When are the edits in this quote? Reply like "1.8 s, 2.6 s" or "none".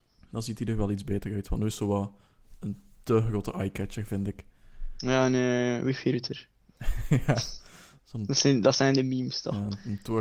none